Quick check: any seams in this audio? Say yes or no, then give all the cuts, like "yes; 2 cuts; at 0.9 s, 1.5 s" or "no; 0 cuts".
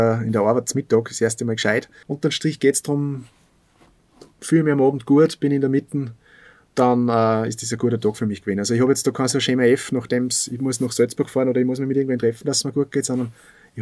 yes; 1 cut; at 2.0 s